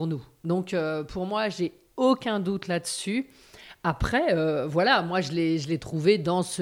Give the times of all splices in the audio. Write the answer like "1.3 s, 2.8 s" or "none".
none